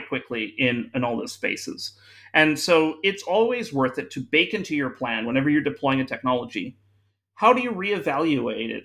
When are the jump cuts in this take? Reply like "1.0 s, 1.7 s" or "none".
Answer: none